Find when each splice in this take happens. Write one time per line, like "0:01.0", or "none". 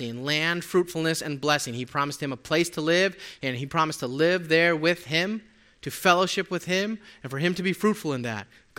none